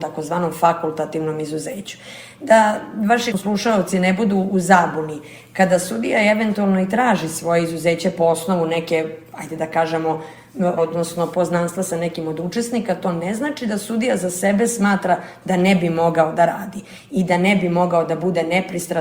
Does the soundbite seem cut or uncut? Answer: cut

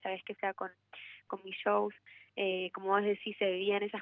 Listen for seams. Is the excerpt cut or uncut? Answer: cut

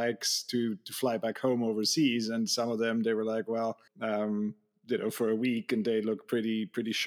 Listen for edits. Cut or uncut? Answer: cut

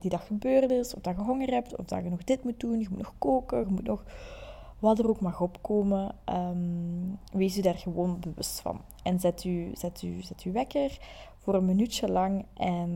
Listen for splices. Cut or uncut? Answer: uncut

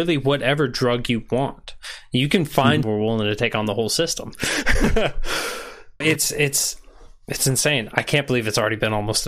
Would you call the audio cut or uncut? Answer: cut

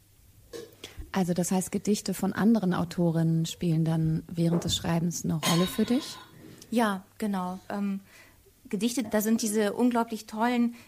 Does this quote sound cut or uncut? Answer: cut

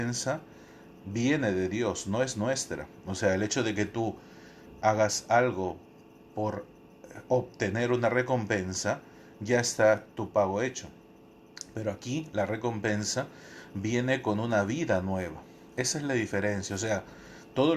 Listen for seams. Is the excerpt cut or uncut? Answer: uncut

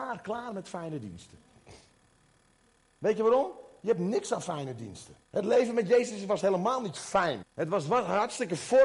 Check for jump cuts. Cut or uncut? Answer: cut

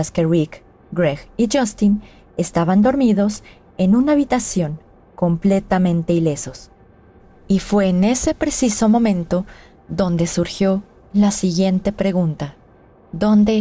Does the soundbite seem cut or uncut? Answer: uncut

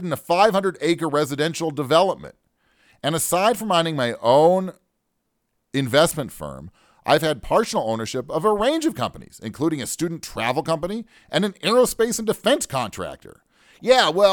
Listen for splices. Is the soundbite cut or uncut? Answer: uncut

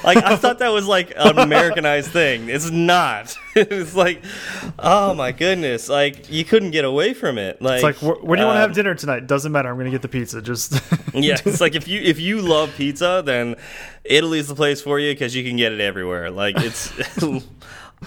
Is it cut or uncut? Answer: uncut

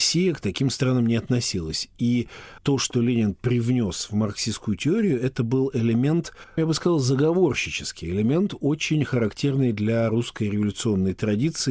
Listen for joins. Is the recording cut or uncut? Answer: uncut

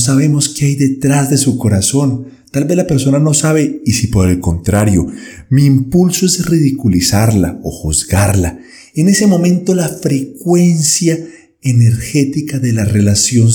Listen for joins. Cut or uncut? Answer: uncut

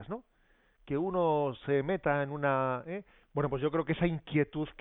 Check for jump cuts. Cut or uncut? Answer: cut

